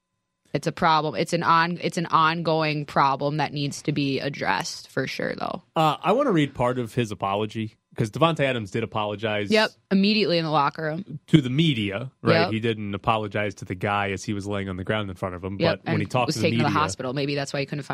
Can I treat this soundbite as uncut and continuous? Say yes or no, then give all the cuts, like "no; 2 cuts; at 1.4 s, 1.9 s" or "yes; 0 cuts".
yes; 0 cuts